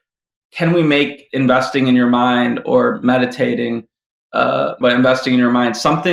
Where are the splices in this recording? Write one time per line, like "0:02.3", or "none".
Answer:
0:04.8

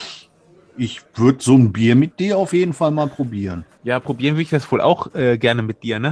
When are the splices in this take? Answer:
0:03.7

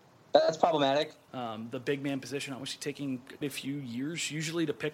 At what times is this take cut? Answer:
0:01.3
0:03.4

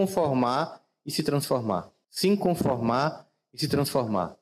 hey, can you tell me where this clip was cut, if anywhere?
0:02.0

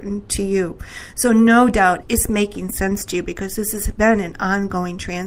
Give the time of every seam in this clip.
0:02.0

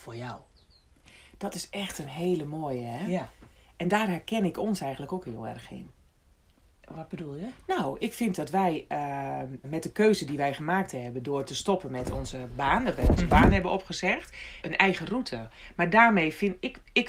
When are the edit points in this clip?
0:09.6
0:14.6

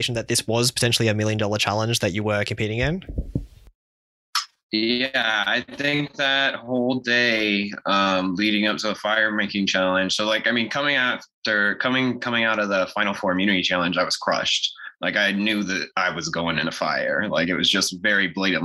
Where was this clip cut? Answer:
none

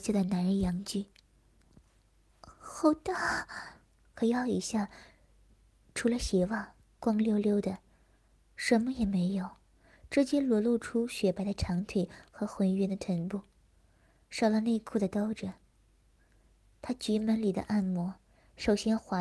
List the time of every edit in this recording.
0:04.0

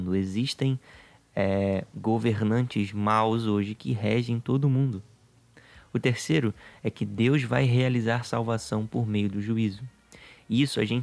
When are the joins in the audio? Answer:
none

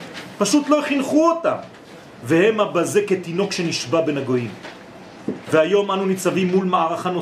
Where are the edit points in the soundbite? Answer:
none

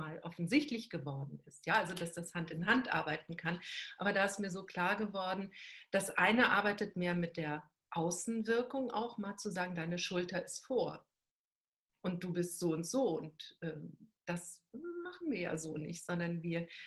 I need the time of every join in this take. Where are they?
none

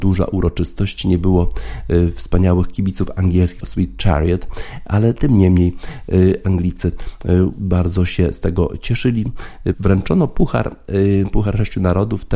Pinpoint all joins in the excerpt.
0:03.6
0:09.7

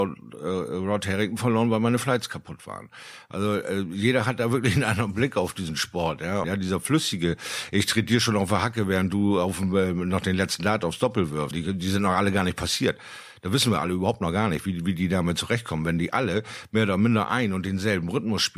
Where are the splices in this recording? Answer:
0:06.4
0:11.5

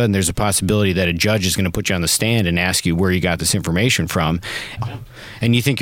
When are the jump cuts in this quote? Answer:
0:04.8

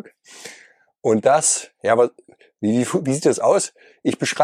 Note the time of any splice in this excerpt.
none

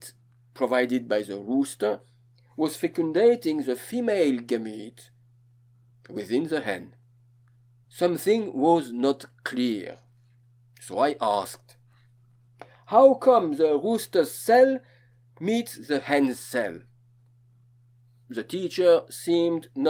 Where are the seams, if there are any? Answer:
0:07.8

